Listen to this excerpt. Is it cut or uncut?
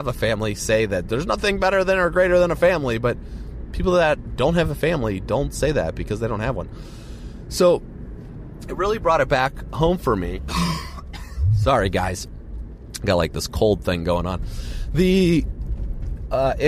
cut